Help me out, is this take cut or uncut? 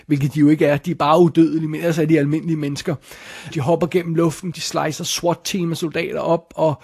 cut